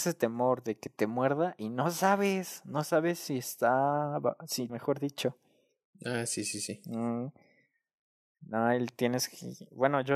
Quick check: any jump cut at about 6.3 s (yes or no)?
no